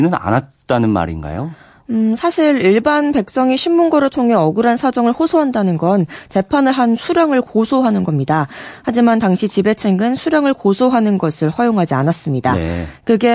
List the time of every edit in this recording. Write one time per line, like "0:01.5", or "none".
none